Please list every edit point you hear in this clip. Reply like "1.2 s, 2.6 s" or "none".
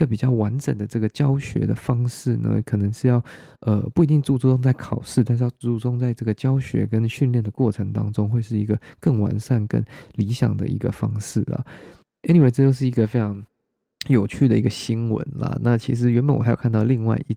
none